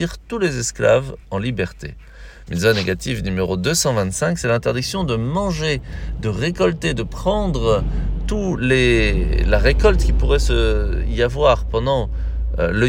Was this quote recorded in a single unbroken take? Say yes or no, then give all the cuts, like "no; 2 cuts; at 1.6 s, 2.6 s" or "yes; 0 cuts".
no; 1 cut; at 2.5 s